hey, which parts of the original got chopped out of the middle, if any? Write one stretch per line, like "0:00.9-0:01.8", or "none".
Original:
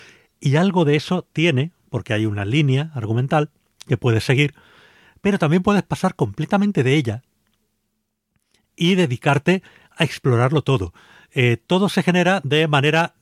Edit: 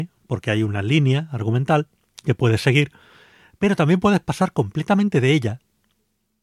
none